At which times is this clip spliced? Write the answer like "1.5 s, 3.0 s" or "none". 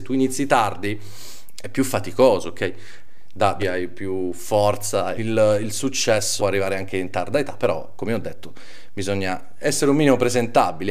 3.6 s, 5.2 s, 6.4 s